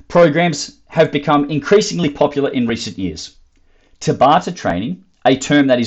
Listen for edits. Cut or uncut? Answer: uncut